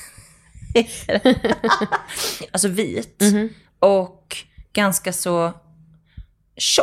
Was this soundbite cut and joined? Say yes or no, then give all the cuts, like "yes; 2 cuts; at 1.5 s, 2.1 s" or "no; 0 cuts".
yes; 1 cut; at 2.5 s